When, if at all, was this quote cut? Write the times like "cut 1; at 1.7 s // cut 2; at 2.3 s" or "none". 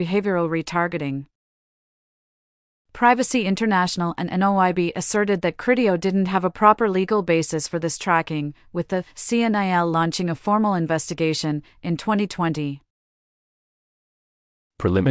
none